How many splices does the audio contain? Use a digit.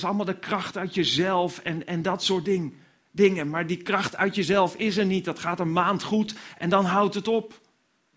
0